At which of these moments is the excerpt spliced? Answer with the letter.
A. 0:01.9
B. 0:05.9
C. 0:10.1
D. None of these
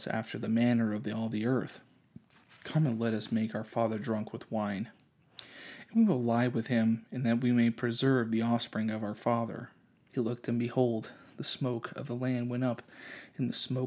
C